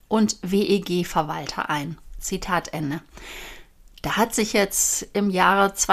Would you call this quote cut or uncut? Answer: uncut